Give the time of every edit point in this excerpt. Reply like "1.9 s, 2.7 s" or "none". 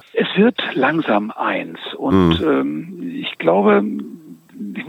none